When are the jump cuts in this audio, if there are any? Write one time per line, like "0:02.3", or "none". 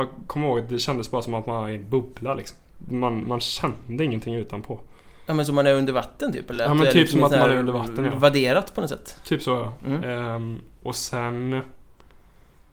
none